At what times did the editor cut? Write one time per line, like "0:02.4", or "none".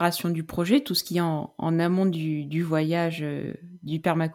none